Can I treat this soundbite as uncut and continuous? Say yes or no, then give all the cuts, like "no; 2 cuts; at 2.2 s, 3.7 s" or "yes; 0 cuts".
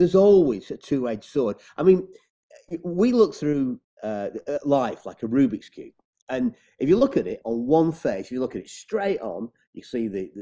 yes; 0 cuts